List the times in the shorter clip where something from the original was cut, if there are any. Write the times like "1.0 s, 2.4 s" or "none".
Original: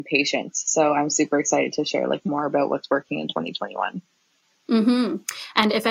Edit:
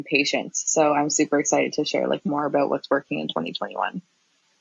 none